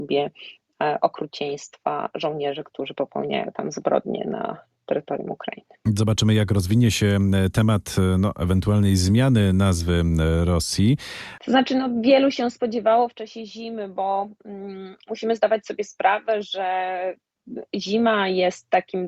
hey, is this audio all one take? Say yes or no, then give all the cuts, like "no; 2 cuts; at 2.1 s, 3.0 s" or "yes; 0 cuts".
no; 1 cut; at 11.4 s